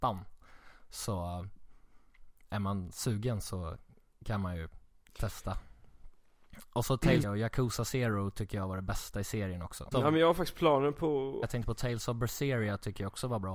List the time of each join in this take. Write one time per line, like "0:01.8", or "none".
0:07.2
0:09.9
0:11.4

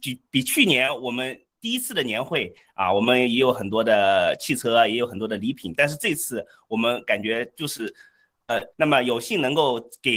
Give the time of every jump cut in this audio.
0:08.7

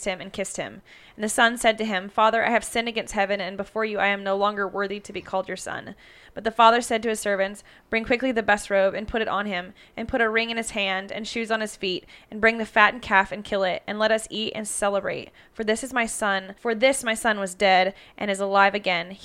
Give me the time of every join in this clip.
0:16.6

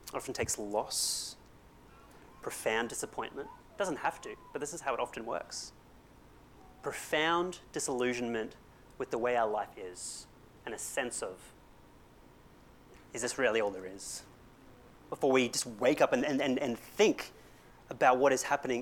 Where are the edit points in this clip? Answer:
none

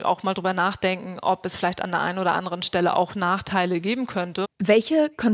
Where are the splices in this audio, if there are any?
0:04.4

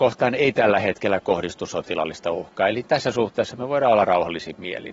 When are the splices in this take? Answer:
none

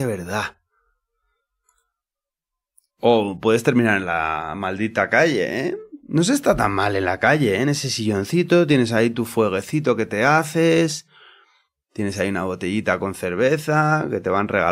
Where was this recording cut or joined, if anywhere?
none

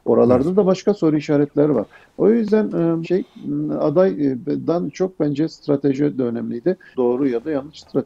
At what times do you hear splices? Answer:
0:03.0
0:06.9

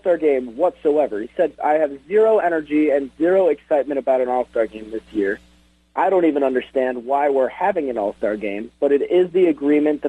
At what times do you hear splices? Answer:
0:01.6

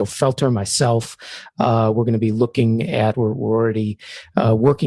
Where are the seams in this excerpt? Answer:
0:03.1

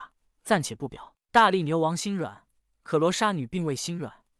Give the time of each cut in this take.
none

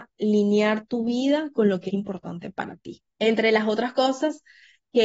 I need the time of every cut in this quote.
0:01.9
0:03.1

